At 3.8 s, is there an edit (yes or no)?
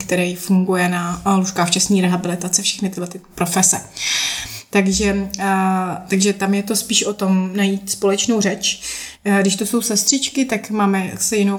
no